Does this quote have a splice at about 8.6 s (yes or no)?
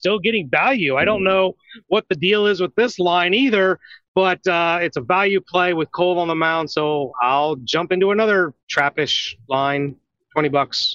yes